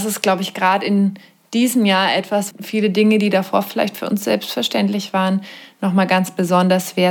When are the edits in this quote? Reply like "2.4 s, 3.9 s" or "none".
2.5 s